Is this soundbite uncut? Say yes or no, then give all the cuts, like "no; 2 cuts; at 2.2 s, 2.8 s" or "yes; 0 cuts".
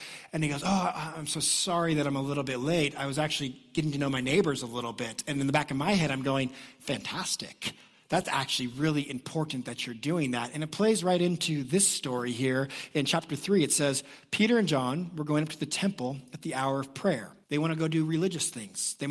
no; 1 cut; at 17.4 s